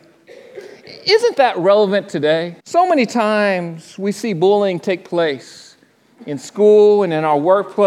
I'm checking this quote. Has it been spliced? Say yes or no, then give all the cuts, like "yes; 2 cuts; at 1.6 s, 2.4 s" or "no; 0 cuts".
yes; 1 cut; at 2.6 s